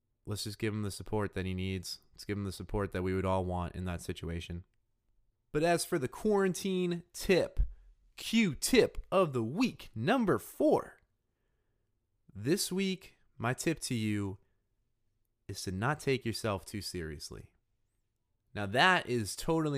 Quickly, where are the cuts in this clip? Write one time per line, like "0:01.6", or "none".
none